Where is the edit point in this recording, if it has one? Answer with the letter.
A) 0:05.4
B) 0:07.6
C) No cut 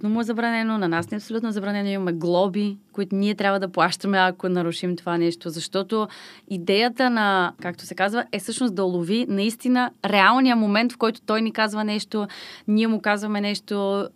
B